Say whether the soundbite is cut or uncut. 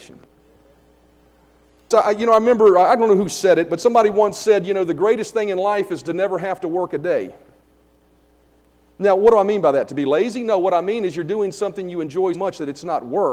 cut